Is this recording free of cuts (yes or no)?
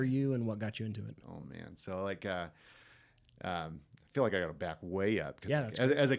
yes